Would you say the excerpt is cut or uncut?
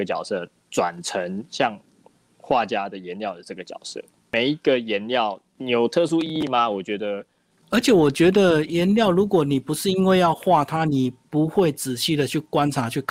cut